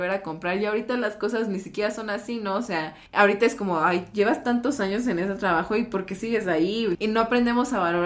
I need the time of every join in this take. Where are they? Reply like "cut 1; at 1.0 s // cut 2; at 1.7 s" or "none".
cut 1; at 3.1 s // cut 2; at 6.9 s